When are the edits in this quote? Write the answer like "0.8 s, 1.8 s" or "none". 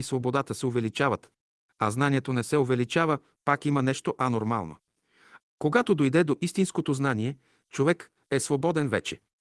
5.4 s